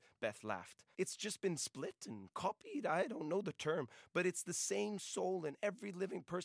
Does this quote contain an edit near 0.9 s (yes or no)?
yes